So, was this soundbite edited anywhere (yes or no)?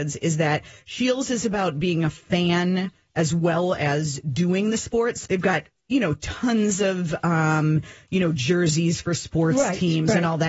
yes